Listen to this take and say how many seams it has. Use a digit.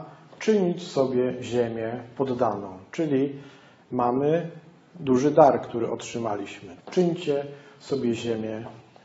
1